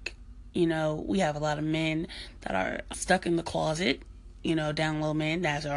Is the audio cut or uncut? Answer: cut